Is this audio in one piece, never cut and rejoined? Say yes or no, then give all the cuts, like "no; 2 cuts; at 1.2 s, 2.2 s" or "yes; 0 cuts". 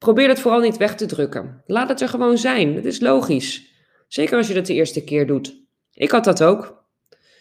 yes; 0 cuts